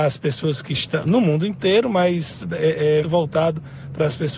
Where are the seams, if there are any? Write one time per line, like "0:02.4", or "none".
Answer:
0:03.0